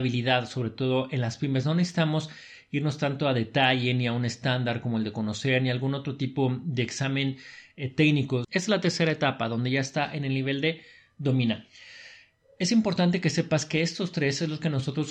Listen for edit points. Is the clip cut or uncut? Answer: cut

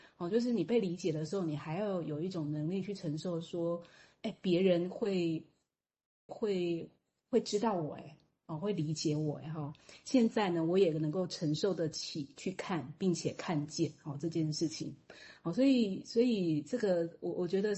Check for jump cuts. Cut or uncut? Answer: cut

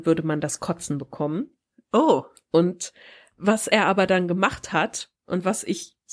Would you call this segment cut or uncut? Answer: uncut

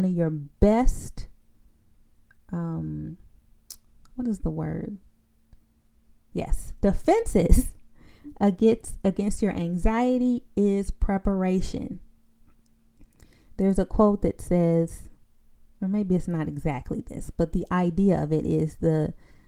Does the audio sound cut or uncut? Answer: cut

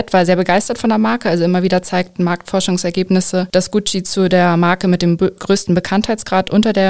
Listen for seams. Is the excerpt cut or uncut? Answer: uncut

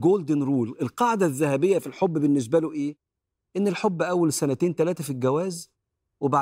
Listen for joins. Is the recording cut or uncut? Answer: uncut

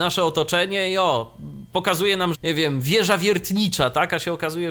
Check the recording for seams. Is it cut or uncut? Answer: cut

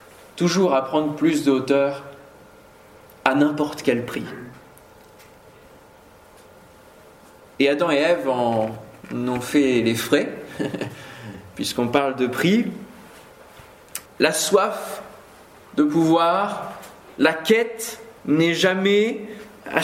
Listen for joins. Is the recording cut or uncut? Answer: cut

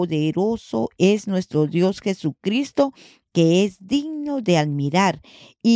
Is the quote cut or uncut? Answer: uncut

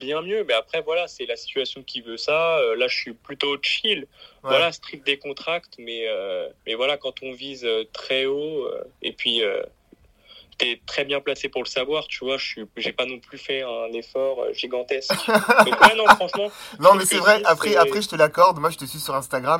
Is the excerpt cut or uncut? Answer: cut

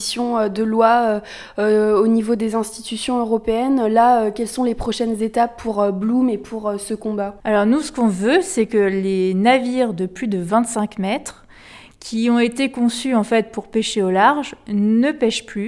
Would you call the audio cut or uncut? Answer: uncut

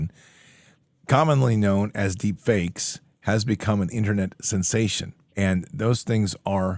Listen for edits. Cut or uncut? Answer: cut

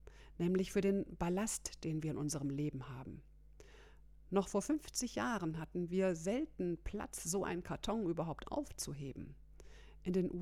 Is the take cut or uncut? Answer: uncut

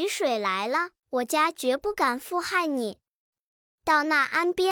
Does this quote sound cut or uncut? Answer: cut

